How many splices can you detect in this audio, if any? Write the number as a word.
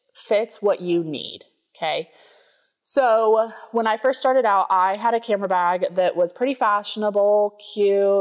zero